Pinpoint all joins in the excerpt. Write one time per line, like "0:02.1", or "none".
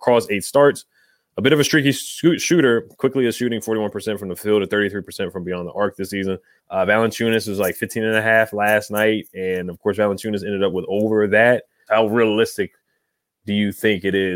0:06.6
0:11.9